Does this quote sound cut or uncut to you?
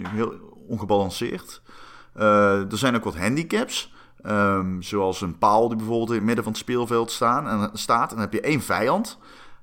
uncut